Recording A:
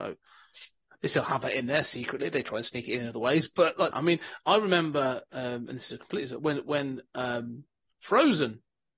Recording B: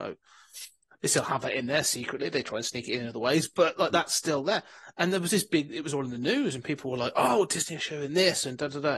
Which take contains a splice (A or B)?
A